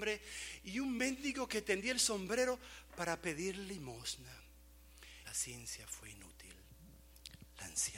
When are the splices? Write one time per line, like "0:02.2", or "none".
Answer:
0:05.2